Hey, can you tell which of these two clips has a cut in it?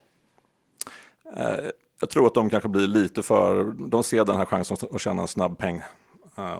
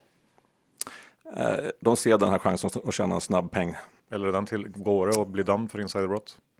second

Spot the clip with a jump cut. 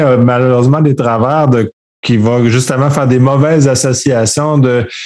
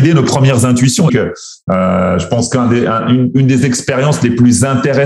second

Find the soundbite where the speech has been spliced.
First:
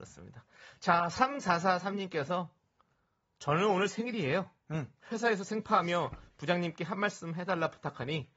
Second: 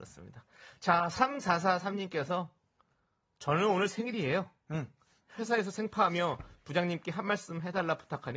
first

